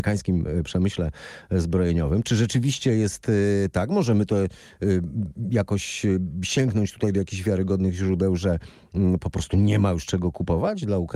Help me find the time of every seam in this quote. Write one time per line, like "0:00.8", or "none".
none

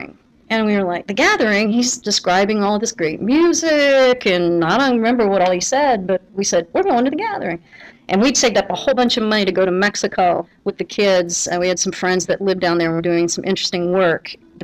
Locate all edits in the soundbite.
0:07.9

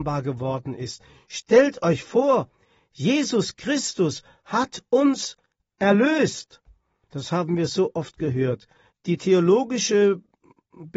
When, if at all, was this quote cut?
0:07.0
0:08.9

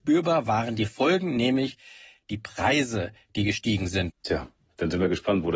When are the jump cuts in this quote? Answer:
0:04.1

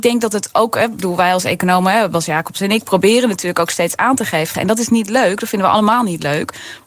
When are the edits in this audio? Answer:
0:04.5

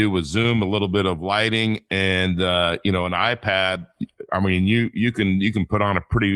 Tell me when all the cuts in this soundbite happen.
none

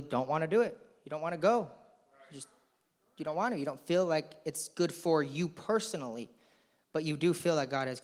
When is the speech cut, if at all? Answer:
none

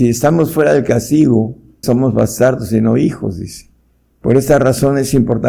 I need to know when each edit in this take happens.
0:01.8

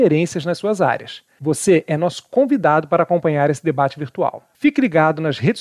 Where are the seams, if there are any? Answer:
none

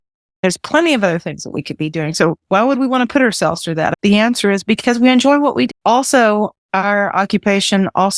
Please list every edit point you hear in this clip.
0:05.7

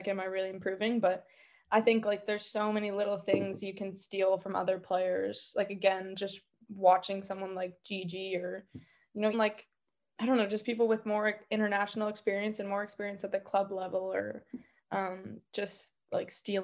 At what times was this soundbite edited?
0:09.3

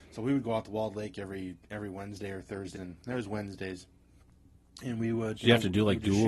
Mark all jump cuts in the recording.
0:02.8
0:05.4

